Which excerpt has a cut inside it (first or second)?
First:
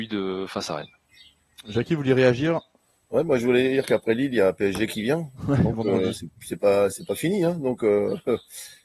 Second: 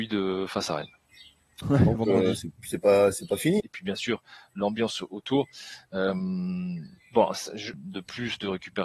second